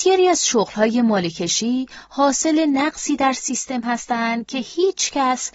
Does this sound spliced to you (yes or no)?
no